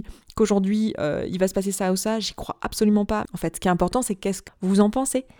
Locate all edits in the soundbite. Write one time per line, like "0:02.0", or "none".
0:03.3
0:04.5